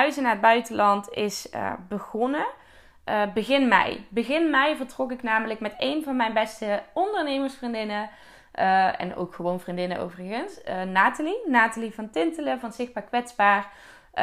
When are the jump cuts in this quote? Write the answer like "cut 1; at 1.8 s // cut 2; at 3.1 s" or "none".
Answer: none